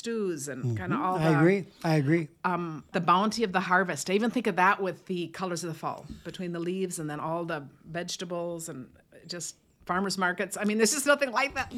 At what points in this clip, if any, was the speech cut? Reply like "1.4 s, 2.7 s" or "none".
2.9 s